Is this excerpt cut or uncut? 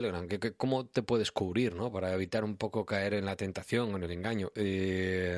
uncut